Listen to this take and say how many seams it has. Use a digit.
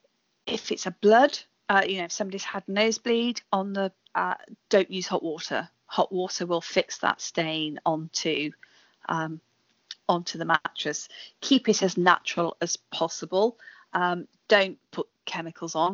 1